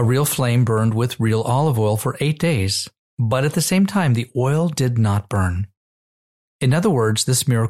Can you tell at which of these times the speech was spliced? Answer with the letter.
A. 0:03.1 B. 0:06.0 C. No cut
C